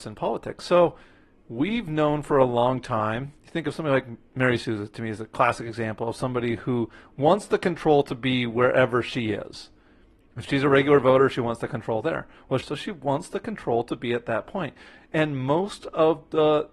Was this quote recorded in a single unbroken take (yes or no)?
no